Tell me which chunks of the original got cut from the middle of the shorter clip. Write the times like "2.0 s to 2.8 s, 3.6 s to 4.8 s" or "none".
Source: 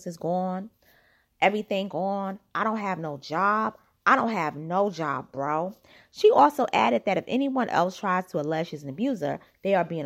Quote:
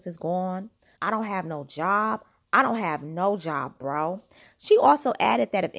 1.0 s to 2.5 s

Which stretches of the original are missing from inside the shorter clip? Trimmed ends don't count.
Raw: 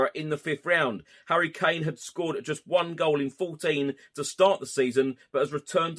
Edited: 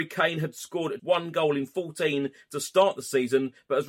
2.4 s to 2.6 s

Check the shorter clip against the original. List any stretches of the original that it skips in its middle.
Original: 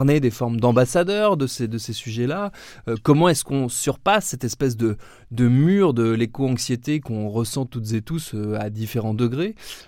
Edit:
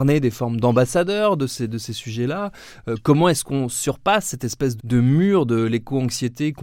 4.8 s to 5.2 s

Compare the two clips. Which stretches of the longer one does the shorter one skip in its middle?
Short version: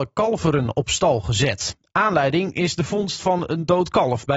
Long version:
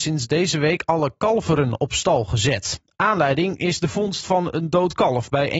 none

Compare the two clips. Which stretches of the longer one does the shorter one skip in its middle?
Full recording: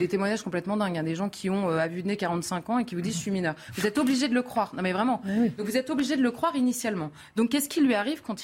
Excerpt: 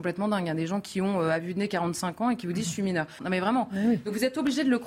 3.7 s to 4.7 s

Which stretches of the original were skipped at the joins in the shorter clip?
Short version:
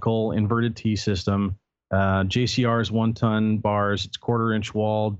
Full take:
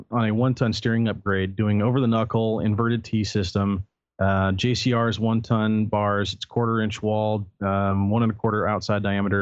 none

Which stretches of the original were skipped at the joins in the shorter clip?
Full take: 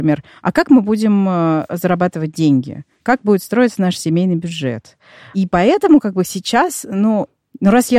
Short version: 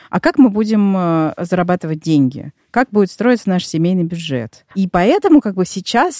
5.0 s to 5.3 s

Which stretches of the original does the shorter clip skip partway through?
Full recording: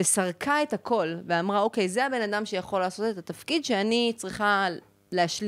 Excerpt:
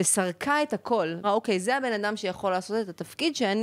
1.2 s to 1.5 s

